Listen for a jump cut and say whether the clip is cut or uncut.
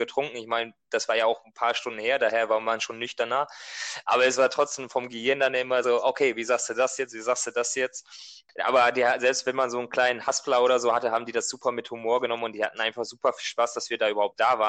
uncut